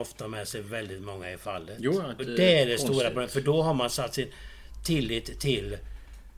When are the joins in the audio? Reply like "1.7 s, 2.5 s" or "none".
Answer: 2.2 s